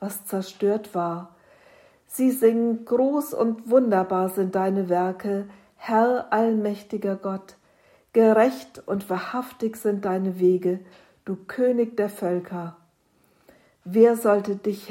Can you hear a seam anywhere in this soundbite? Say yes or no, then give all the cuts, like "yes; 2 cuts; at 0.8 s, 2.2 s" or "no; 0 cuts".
no; 0 cuts